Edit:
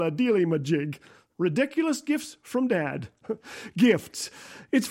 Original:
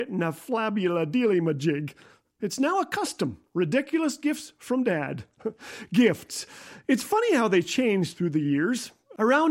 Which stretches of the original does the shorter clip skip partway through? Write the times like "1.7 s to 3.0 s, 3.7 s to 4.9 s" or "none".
2.3 s to 3.5 s